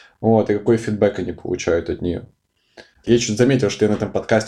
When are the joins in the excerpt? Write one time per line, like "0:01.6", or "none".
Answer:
0:03.0